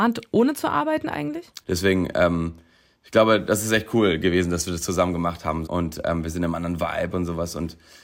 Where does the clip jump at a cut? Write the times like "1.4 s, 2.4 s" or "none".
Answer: 1.6 s, 5.6 s